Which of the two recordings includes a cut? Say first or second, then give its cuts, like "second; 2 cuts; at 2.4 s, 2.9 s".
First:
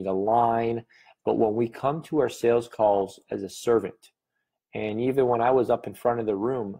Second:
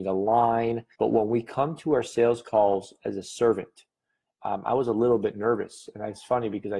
second; 2 cuts; at 0.9 s, 4.4 s